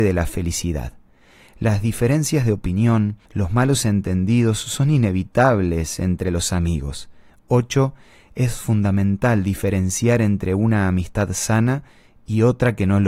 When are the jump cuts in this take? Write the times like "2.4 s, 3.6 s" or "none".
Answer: 3.3 s, 7.3 s

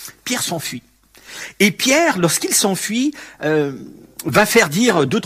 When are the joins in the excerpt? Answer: none

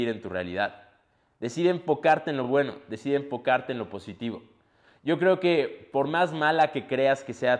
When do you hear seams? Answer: none

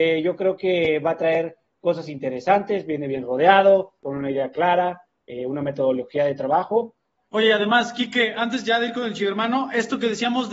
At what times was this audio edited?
4.0 s, 7.2 s

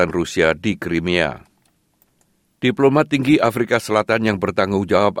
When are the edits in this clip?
none

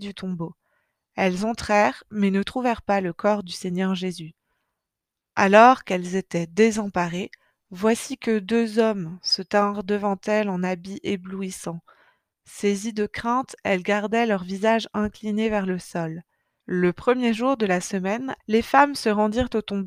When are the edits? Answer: 16.6 s, 18.4 s

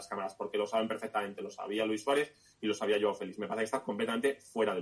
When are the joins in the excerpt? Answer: none

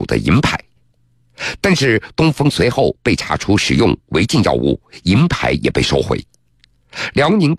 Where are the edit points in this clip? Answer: none

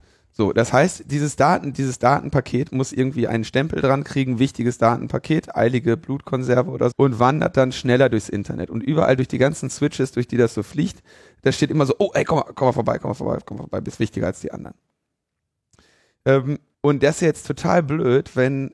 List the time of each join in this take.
6.9 s, 16.7 s

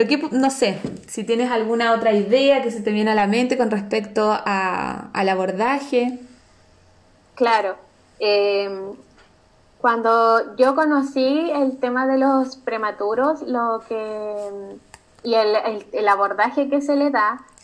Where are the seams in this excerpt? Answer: none

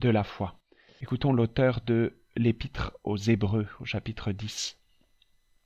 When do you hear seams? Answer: none

